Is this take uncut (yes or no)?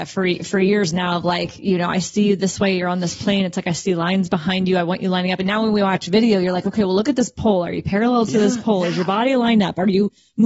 yes